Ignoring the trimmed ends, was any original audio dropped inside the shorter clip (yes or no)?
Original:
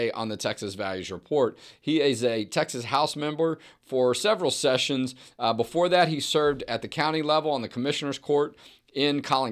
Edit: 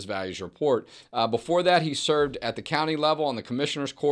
yes